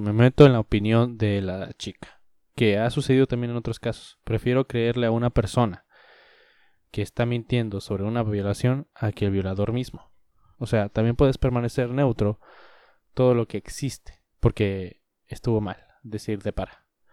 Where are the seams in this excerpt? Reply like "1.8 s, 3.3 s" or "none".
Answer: 10.5 s, 13.0 s, 14.3 s

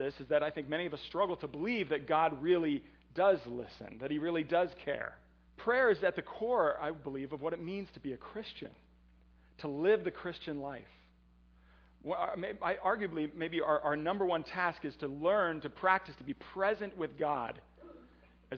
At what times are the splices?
5.5 s

